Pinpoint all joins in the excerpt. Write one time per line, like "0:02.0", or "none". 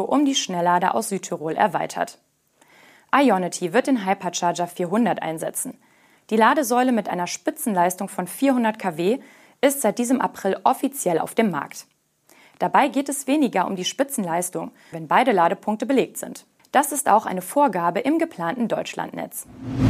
0:14.9
0:16.6